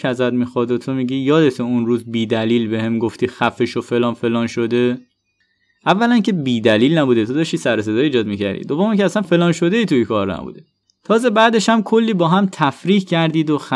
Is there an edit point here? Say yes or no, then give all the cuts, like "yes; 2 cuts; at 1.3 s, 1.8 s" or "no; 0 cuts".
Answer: yes; 1 cut; at 9.2 s